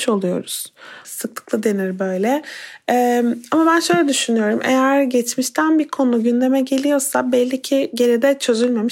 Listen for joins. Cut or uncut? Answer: cut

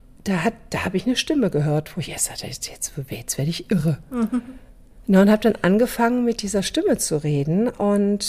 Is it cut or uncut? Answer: uncut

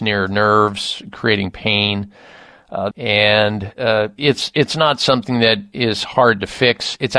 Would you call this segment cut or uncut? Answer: cut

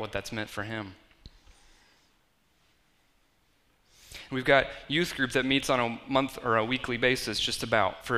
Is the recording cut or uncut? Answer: uncut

